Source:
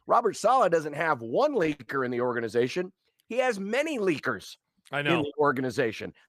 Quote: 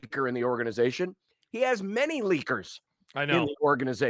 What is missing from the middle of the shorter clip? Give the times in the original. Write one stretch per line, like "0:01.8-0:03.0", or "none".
none